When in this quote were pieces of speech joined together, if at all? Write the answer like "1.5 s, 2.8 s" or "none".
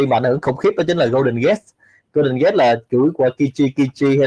none